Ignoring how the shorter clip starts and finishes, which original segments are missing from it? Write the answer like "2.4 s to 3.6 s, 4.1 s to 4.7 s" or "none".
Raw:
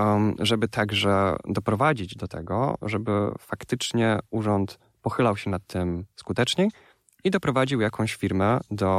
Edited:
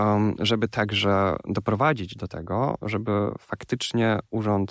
none